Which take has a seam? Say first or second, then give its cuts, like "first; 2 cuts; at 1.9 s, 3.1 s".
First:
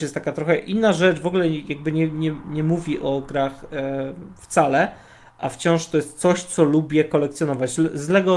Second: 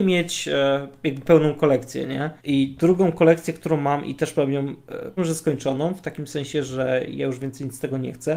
second; 2 cuts; at 2.4 s, 5.2 s